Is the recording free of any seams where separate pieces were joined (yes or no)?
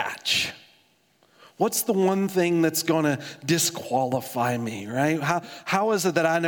yes